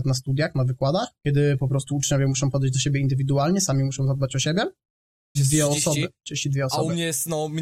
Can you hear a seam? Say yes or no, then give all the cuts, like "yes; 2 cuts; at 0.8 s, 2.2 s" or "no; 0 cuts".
yes; 2 cuts; at 1.2 s, 5.4 s